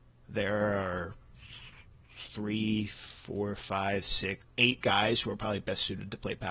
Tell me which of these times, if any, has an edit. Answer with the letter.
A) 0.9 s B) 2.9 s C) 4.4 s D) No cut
C